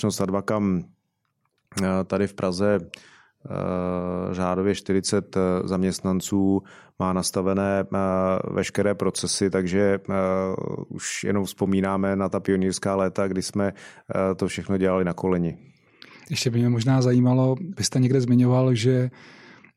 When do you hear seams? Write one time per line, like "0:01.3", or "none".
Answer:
none